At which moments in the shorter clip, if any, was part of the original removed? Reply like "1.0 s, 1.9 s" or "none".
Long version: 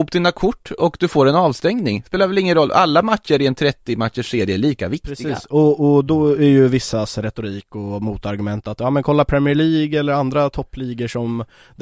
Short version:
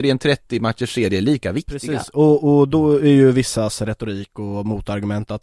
none